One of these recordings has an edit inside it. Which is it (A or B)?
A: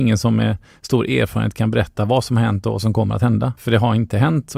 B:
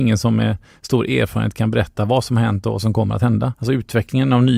B